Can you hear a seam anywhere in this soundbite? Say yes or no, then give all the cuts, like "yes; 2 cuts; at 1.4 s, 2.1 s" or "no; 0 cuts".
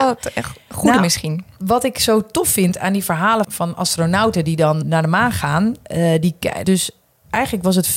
yes; 3 cuts; at 3.4 s, 4.8 s, 6.6 s